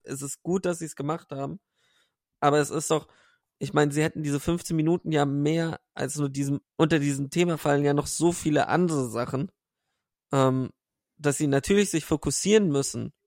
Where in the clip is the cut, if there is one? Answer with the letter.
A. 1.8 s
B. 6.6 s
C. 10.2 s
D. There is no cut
B